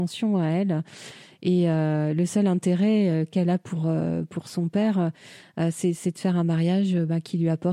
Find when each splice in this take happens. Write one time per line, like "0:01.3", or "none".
none